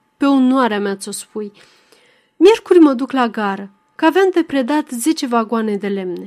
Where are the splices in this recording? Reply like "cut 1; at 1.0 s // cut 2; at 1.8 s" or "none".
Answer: none